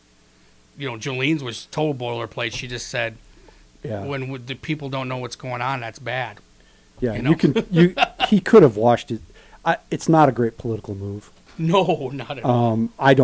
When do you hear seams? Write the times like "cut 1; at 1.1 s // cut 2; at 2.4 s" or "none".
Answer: none